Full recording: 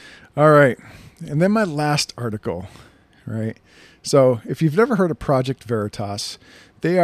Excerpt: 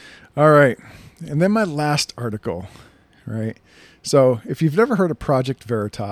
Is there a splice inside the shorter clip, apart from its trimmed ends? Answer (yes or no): no